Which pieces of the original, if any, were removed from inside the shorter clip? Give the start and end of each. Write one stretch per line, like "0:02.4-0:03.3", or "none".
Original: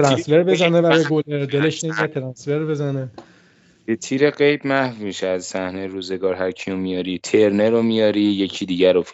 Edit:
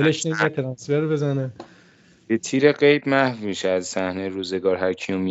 none